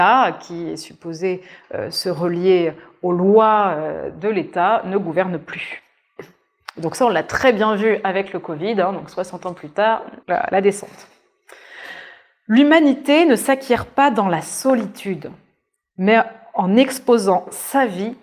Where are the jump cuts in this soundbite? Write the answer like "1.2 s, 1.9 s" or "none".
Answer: 10.2 s